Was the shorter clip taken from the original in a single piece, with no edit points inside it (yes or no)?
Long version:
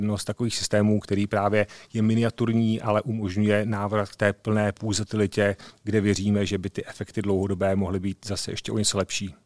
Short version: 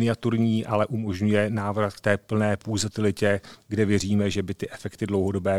yes